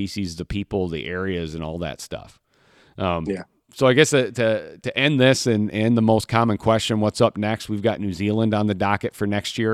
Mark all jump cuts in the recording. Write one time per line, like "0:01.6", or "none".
none